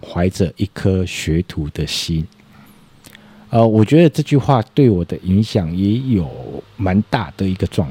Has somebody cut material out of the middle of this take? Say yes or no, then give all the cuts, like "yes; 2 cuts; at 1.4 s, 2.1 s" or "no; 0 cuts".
no; 0 cuts